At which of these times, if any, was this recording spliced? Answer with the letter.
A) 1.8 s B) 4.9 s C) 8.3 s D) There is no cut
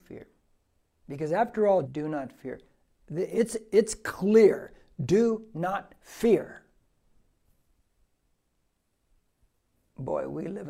A